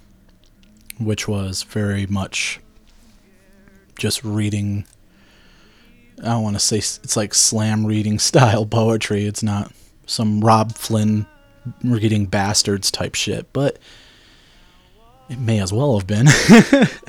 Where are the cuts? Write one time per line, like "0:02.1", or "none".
none